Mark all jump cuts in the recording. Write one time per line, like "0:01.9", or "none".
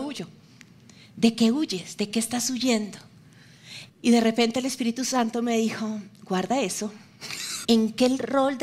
0:03.9
0:07.6